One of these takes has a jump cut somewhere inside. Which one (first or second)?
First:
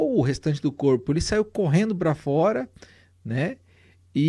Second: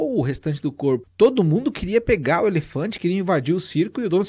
second